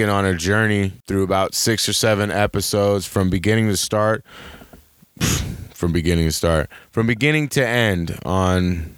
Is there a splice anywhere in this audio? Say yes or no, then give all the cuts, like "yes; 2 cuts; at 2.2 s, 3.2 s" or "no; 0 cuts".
yes; 1 cut; at 1.0 s